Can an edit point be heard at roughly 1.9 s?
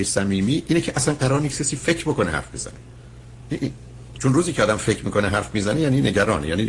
no; 1 cut; at 4.1 s

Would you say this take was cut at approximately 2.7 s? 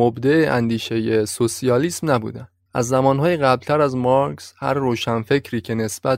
yes; 1 cut; at 2.7 s

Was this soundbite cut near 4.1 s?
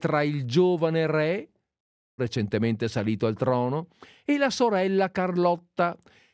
no; 1 cut; at 2.2 s

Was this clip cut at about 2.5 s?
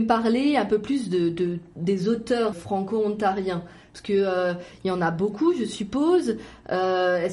yes; 1 cut; at 2.5 s

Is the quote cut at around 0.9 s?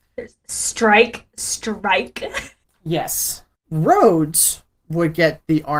no; 1 cut; at 3.6 s

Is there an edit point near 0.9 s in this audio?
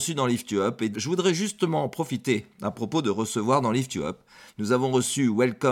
yes; 1 cut; at 0.9 s

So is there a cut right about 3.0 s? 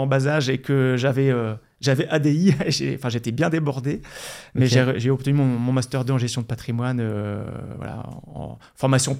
no; 0 cuts

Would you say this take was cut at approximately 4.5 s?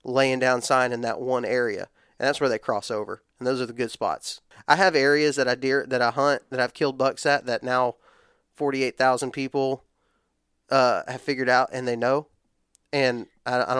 yes; 1 cut; at 4.5 s

